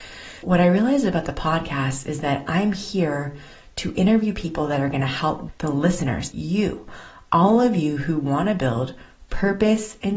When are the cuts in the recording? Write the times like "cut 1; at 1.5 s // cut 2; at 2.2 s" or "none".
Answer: cut 1; at 6.3 s